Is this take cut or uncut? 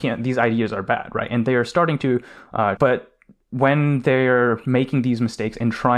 cut